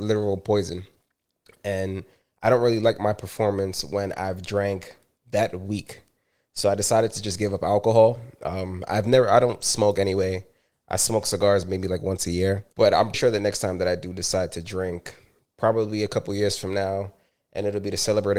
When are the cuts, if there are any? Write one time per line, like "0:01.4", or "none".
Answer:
0:13.1